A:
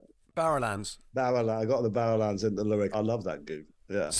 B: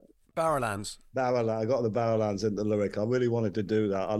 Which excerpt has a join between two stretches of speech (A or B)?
A